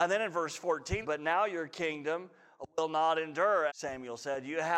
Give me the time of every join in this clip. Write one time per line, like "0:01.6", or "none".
0:01.0
0:03.7

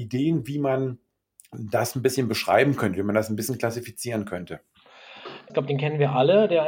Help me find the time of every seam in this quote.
0:05.5

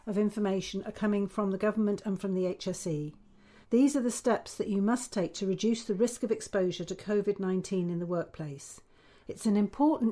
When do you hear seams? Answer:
0:03.6

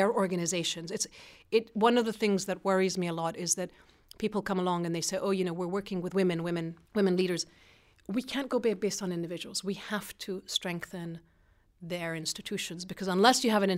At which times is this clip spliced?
0:06.9

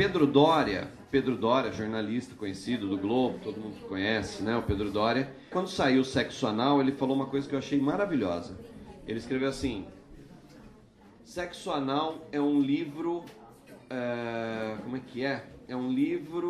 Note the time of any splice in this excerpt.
0:05.5

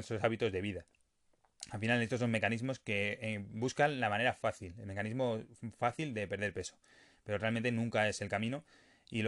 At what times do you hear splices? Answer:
none

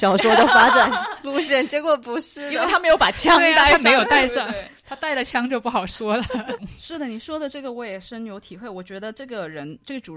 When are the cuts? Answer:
0:06.6

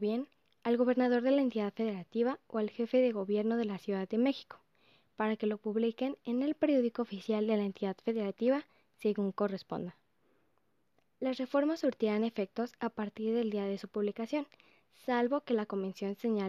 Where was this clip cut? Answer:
none

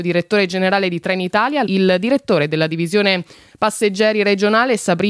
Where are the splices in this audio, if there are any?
0:01.7

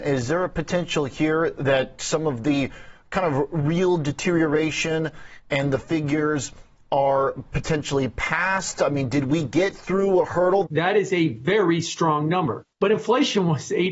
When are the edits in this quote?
0:10.6
0:12.7

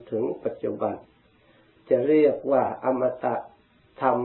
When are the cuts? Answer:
none

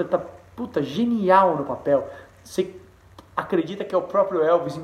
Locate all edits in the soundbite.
none

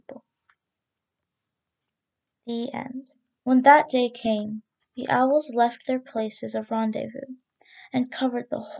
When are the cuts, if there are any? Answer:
0:03.4
0:04.8

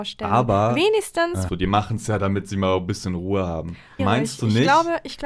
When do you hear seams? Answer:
0:01.5
0:04.0

